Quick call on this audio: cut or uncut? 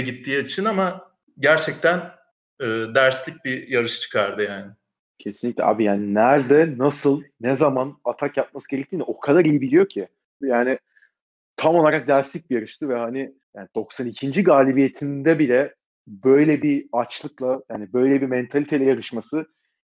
cut